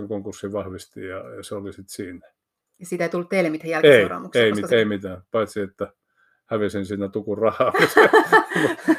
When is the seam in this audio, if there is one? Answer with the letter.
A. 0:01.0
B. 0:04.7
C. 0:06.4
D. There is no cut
B